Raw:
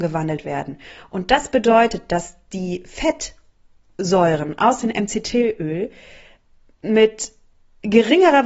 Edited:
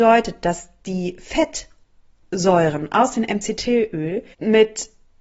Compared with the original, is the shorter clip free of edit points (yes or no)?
no